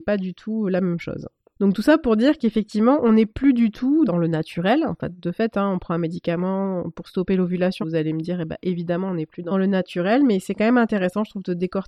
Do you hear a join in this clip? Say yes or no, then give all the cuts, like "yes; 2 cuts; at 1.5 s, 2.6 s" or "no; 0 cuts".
yes; 1 cut; at 7.8 s